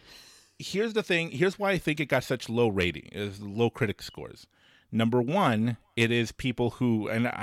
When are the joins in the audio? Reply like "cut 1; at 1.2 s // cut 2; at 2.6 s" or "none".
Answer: none

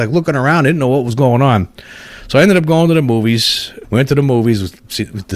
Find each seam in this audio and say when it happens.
cut 1; at 3.8 s

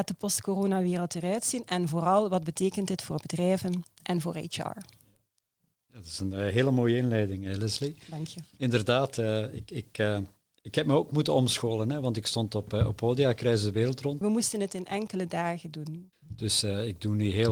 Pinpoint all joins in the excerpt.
cut 1; at 14.2 s // cut 2; at 16.1 s

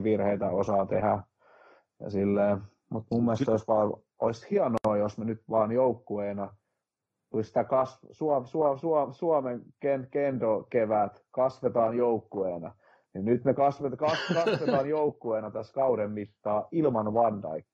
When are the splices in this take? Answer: none

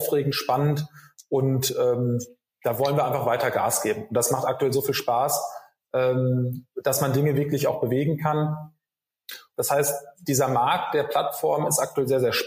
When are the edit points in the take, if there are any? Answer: cut 1; at 6.7 s // cut 2; at 9.5 s

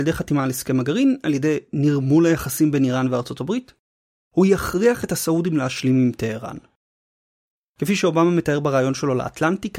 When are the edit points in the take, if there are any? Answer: none

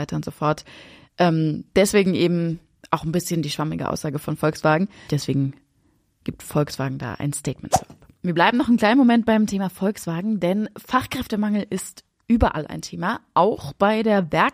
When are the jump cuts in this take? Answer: cut 1; at 5.1 s

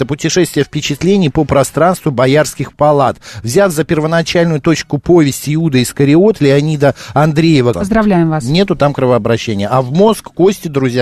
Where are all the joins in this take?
cut 1; at 7.7 s

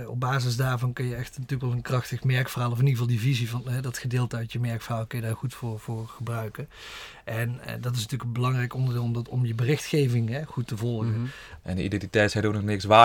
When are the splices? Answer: cut 1; at 11.6 s

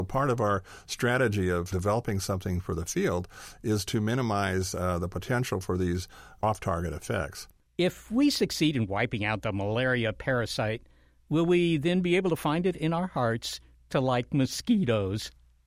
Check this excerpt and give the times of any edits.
cut 1; at 7.7 s

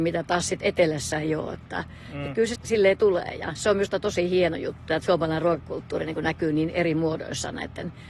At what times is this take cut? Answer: cut 1; at 2.6 s // cut 2; at 4.9 s

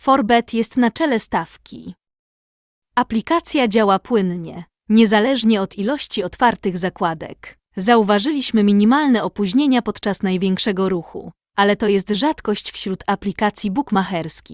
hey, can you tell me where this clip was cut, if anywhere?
cut 1; at 7.7 s

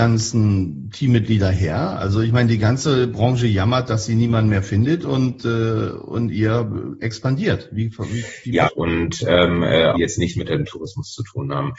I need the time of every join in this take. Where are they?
cut 1; at 8.6 s // cut 2; at 9.9 s

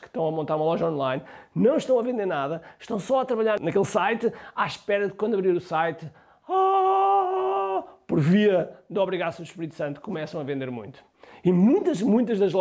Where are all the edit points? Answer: none

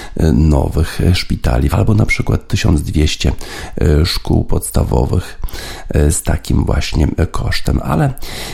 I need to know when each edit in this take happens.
cut 1; at 1.7 s

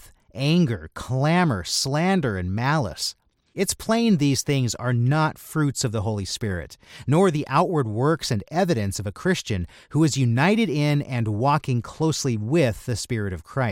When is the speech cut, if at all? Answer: none

